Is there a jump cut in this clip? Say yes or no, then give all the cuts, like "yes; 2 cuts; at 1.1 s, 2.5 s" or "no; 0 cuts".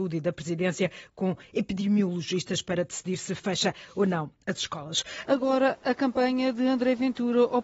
yes; 1 cut; at 5.2 s